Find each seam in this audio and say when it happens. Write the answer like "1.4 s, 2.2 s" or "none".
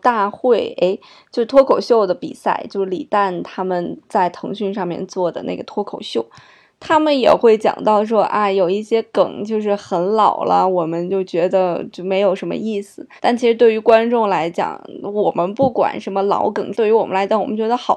13.2 s, 16.7 s